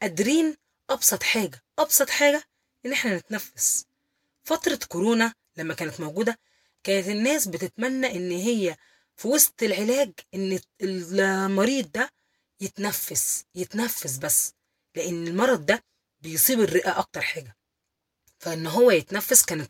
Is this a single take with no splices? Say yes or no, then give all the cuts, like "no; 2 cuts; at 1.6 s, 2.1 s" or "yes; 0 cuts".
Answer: yes; 0 cuts